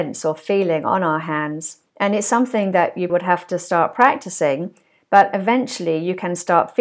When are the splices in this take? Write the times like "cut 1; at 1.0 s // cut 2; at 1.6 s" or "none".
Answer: cut 1; at 1.9 s // cut 2; at 3.1 s